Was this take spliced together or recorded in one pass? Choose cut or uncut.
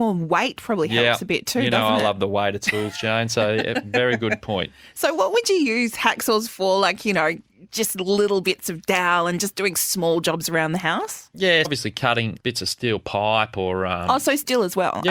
cut